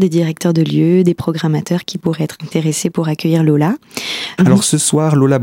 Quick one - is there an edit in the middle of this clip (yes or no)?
yes